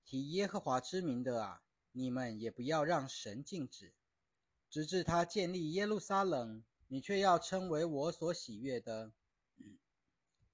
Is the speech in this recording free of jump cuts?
no; 2 cuts; at 1.8 s, 6.8 s

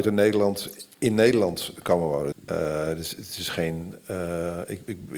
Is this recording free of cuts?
no; 1 cut; at 2.3 s

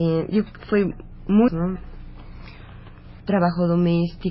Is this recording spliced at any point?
yes; 2 cuts; at 1.5 s, 3.2 s

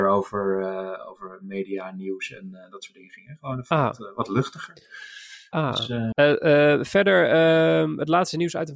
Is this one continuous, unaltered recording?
no; 1 cut; at 6.1 s

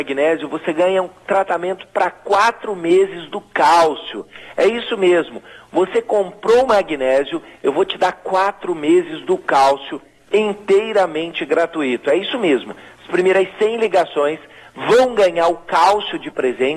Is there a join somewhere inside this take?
no; 0 cuts

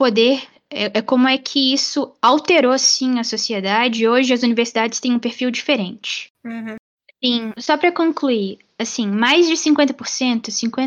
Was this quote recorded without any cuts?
no; 1 cut; at 7.6 s

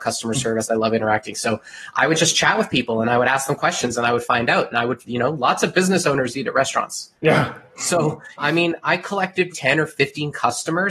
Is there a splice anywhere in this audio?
yes; 2 cuts; at 8.4 s, 9.5 s

